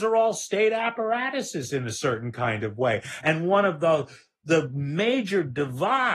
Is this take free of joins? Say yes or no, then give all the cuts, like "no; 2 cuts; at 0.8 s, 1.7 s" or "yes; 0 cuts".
no; 1 cut; at 3.2 s